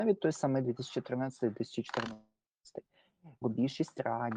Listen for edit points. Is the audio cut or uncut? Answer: cut